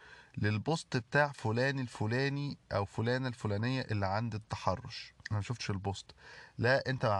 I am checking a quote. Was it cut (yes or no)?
yes